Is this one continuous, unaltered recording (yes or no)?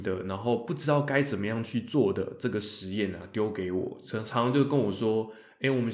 yes